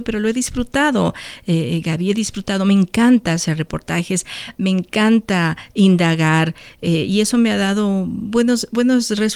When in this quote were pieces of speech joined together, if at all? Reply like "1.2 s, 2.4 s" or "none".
none